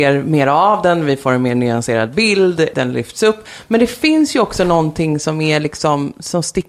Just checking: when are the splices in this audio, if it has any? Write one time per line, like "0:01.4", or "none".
0:02.7